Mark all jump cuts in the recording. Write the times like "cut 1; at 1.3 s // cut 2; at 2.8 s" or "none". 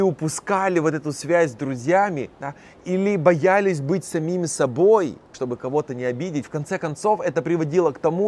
cut 1; at 2.3 s // cut 2; at 5.3 s